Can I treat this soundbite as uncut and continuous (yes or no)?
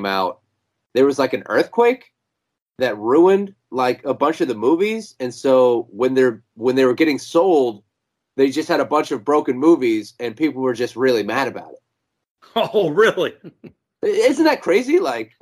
yes